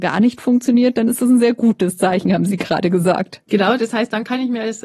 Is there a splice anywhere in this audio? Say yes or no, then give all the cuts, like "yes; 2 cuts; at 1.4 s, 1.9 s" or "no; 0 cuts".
yes; 1 cut; at 3.5 s